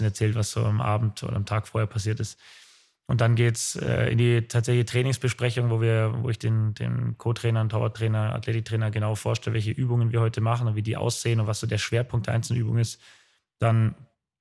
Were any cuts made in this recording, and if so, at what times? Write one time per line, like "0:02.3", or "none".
none